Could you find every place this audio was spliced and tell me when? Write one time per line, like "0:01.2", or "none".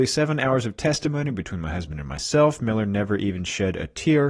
none